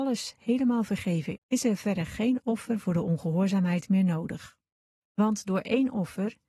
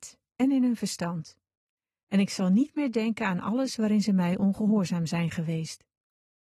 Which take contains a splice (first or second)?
first